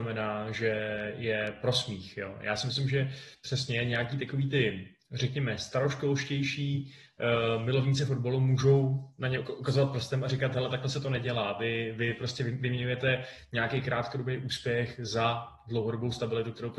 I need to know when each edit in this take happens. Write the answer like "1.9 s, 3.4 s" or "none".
none

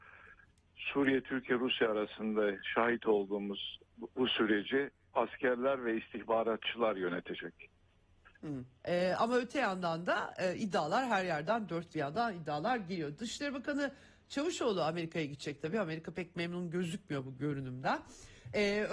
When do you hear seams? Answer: 8.8 s

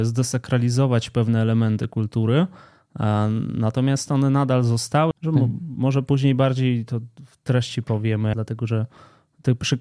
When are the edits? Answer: 5.1 s, 8.3 s

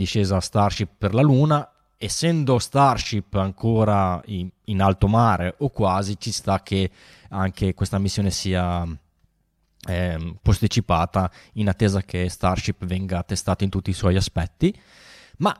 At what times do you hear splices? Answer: 10.4 s

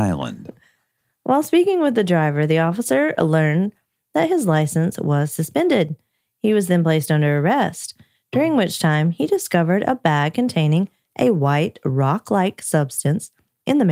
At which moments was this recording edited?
none

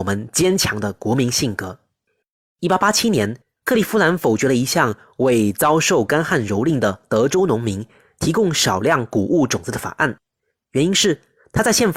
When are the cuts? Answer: none

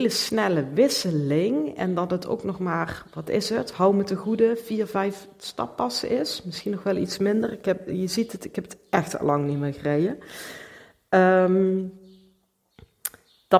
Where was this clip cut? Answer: none

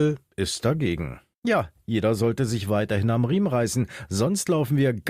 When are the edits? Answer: 1.3 s

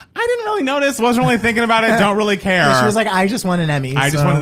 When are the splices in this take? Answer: none

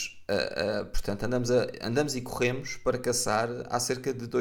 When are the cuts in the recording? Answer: none

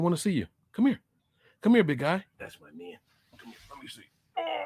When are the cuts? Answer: 2.3 s

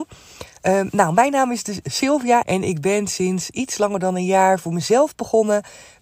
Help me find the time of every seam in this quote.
2.4 s

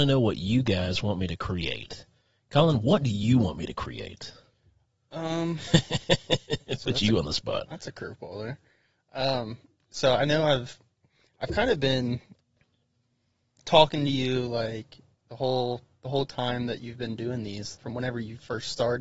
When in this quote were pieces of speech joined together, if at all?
17.7 s

